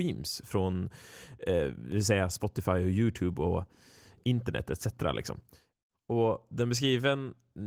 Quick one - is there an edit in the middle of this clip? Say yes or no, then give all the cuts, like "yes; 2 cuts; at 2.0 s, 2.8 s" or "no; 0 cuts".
no; 0 cuts